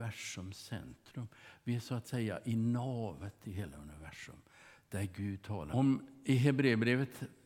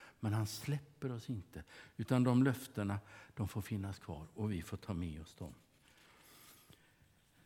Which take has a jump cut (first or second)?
first